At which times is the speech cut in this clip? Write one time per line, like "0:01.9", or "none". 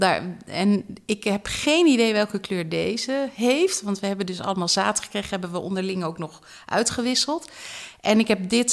none